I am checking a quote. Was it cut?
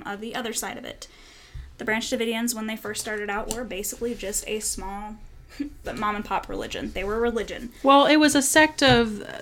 yes; 1 cut; at 5.8 s

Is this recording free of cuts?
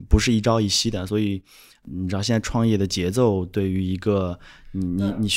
yes; 0 cuts

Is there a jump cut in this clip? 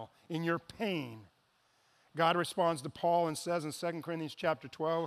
no; 0 cuts

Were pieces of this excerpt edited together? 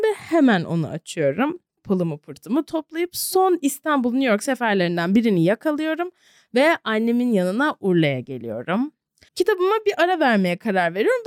yes; 2 cuts; at 1.8 s, 9.3 s

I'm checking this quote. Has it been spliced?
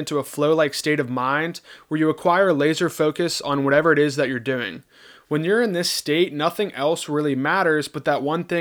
no; 0 cuts

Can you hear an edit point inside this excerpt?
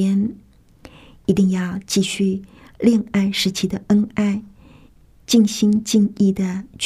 no; 0 cuts

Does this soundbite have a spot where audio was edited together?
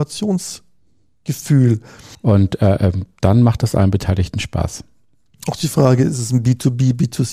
yes; 1 cut; at 2.1 s

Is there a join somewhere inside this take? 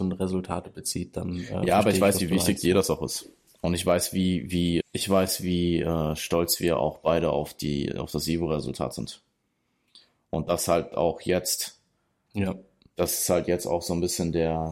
yes; 1 cut; at 4.8 s

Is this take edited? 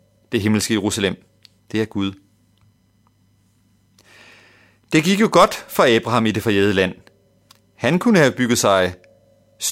no; 0 cuts

